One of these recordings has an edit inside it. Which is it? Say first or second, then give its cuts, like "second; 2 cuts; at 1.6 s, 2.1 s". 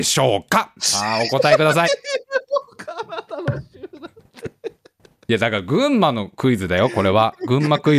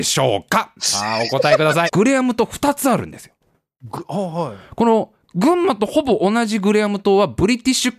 second; 1 cut; at 1.9 s